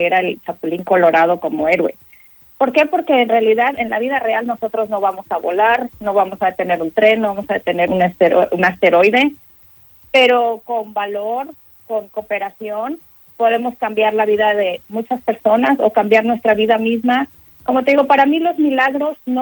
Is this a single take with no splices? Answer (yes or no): no